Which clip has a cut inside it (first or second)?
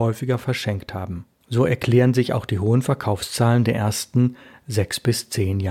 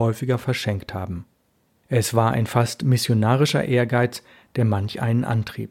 first